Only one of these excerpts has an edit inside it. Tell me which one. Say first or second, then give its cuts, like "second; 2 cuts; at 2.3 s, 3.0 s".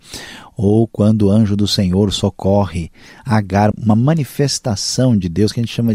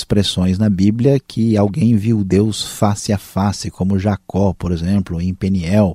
first; 1 cut; at 3.7 s